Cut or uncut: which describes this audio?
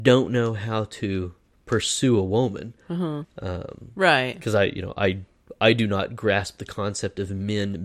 cut